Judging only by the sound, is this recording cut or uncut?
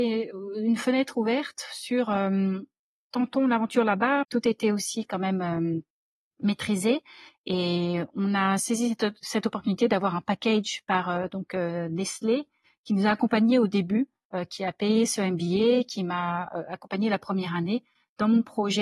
cut